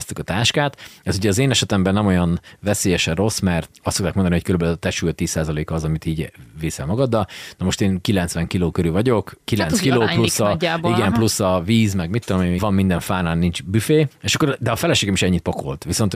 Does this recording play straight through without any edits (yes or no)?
no